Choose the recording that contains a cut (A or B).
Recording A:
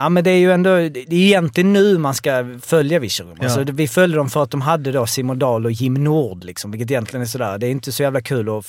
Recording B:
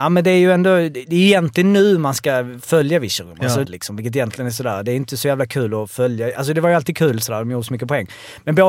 B